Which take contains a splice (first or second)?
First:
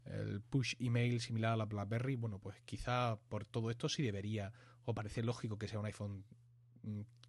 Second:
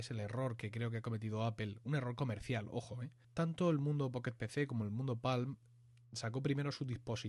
second